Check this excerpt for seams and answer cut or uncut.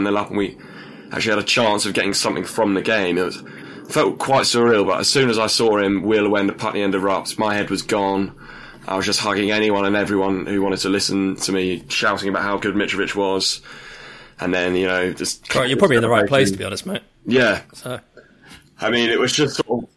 uncut